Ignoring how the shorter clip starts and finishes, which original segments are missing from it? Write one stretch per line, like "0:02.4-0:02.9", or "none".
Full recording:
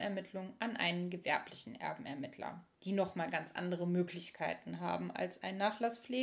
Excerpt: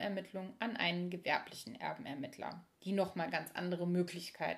none